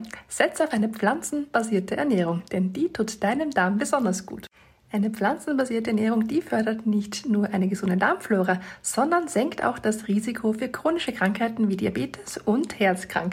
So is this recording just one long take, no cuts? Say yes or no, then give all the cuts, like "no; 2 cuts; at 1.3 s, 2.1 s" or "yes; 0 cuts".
yes; 0 cuts